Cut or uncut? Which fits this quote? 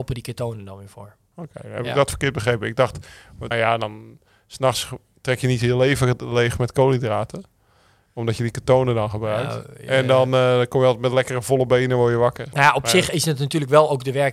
cut